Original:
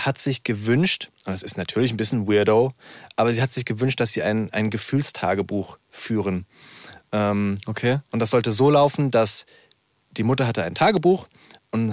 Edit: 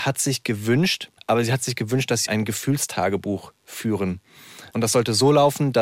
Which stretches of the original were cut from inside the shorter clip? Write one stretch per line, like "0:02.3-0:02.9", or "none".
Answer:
0:01.2-0:03.1
0:04.1-0:04.5
0:06.9-0:08.1